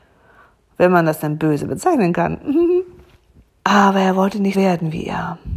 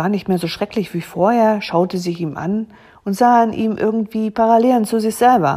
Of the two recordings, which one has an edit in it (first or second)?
first